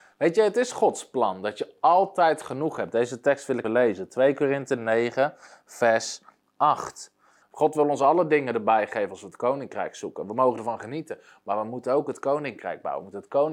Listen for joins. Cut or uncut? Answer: cut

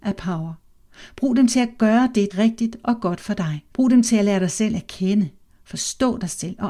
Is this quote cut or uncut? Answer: cut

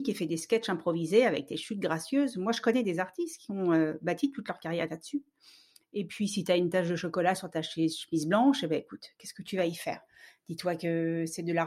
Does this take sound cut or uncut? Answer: uncut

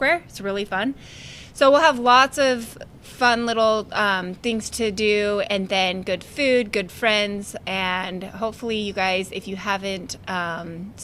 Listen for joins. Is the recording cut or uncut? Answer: uncut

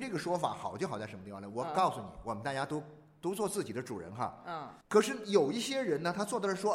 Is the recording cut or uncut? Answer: cut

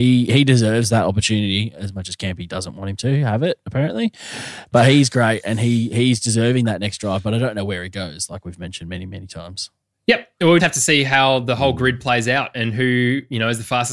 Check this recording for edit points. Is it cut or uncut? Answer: cut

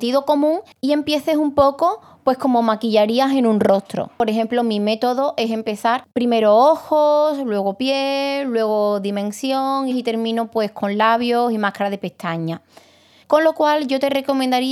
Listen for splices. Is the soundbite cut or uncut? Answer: cut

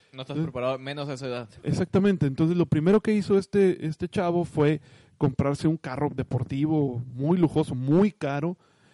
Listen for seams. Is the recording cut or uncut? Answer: uncut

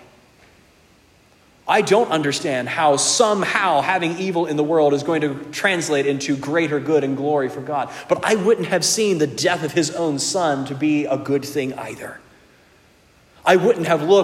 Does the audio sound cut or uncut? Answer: uncut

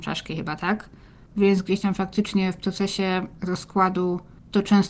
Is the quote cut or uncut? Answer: cut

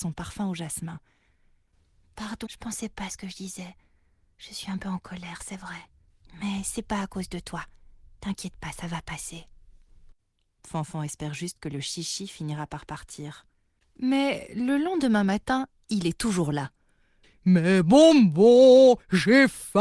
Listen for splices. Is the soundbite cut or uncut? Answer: cut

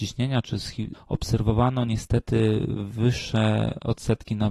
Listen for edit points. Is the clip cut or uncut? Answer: cut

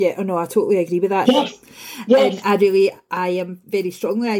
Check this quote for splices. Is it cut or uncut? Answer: cut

